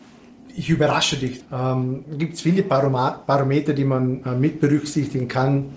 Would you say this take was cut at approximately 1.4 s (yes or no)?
yes